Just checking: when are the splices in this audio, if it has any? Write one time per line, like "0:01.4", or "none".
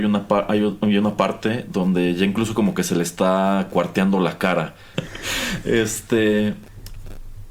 0:04.9